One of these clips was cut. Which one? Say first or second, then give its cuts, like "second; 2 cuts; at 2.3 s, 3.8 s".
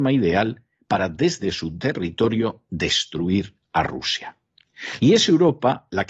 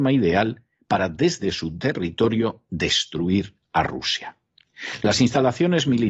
first; 1 cut; at 5.0 s